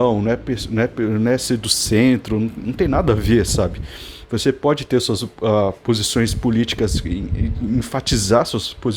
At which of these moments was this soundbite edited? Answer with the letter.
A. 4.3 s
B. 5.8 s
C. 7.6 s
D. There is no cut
D